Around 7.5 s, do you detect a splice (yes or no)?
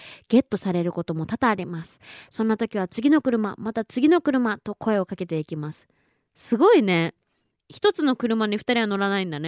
yes